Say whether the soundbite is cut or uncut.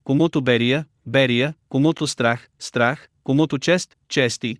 uncut